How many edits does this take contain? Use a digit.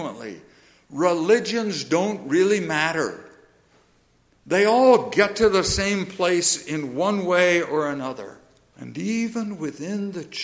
1